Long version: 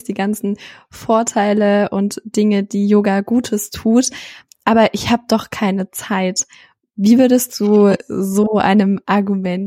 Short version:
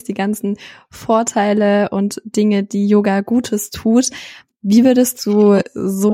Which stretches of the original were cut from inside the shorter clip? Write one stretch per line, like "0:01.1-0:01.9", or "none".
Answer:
0:04.5-0:06.8